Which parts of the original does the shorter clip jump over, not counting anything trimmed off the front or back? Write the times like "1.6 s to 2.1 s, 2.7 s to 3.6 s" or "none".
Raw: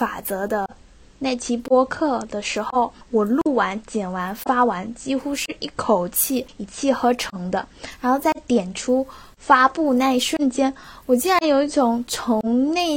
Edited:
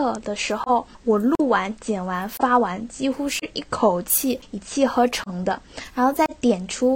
none